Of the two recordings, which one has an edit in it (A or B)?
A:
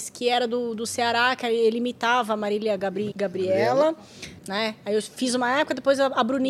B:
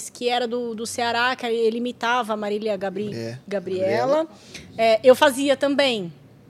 A